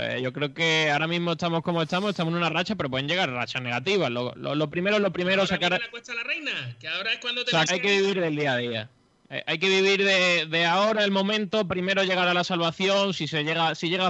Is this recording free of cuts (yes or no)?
no